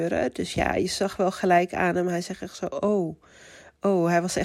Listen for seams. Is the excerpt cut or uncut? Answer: uncut